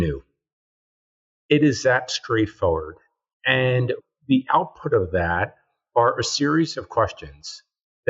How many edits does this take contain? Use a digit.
0